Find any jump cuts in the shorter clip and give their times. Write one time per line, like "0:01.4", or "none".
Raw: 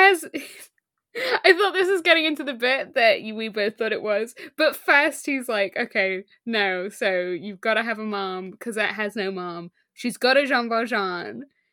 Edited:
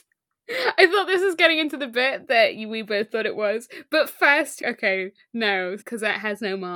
0:04.6
0:05.8